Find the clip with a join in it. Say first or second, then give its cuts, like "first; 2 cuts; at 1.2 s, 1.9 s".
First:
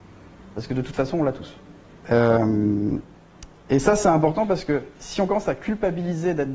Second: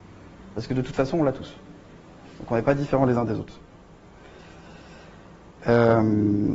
first; 2 cuts; at 2.0 s, 5.0 s